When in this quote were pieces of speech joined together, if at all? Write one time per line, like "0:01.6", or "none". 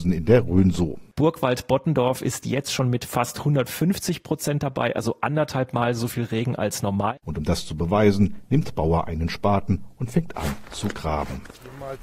0:01.1
0:07.2